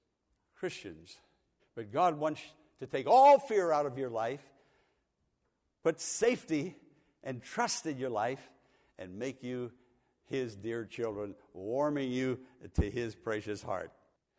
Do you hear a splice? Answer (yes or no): yes